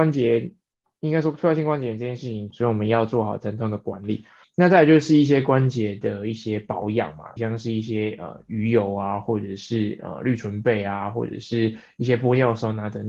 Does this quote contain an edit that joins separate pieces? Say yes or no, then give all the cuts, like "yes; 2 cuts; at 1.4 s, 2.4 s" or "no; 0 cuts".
yes; 3 cuts; at 2.5 s, 4.4 s, 7.4 s